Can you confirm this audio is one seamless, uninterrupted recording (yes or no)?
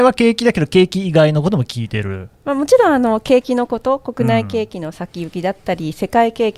yes